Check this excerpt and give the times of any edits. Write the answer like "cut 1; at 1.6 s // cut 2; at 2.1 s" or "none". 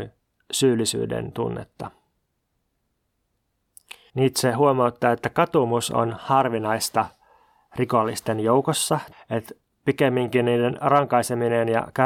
cut 1; at 4.1 s // cut 2; at 9.1 s